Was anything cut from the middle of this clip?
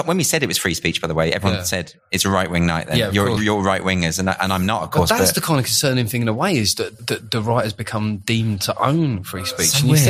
yes; 2 cuts; at 3.4 s, 7.0 s

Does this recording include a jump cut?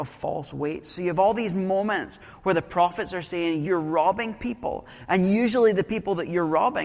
yes; 1 cut; at 3.6 s

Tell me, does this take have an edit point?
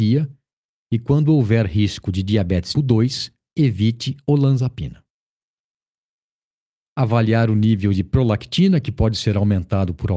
yes; 2 cuts; at 2.7 s, 6.8 s

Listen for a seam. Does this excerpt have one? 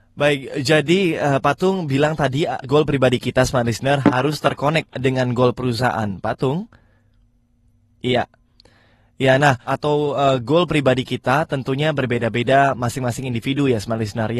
yes; 2 cuts; at 2.6 s, 9.7 s

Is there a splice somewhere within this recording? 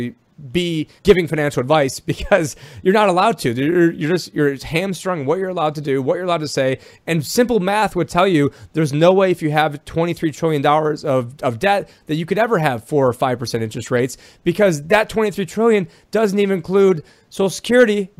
yes; 1 cut; at 1.0 s

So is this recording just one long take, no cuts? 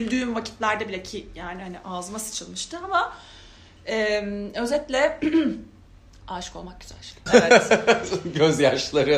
no; 1 cut; at 7.3 s

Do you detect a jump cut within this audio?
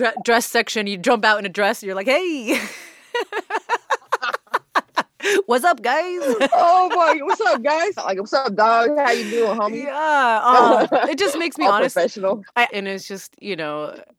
yes; 2 cuts; at 8.0 s, 12.7 s

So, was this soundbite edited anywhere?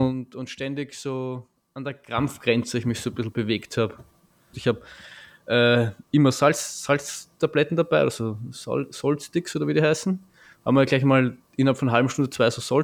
yes; 1 cut; at 4.5 s

